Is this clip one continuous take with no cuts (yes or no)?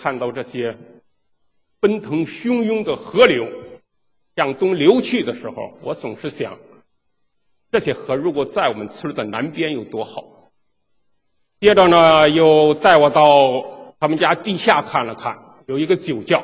no